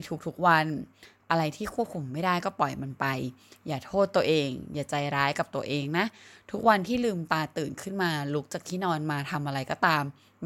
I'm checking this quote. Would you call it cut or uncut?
uncut